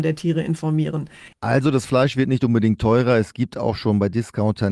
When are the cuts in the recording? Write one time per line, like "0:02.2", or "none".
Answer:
0:01.3